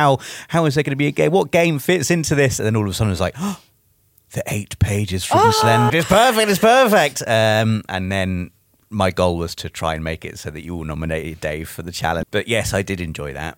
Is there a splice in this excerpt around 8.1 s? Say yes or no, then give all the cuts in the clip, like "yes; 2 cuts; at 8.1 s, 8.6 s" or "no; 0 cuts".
no; 2 cuts; at 5.9 s, 12.2 s